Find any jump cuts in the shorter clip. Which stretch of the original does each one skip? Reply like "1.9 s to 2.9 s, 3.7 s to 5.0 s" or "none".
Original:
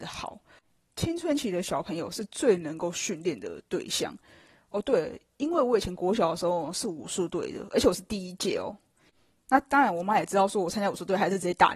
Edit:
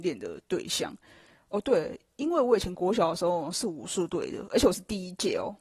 none